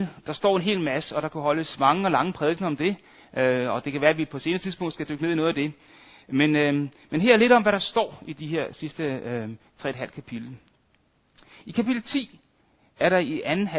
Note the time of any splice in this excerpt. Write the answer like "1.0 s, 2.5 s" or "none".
none

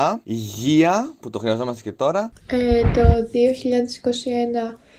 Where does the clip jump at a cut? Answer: 2.3 s

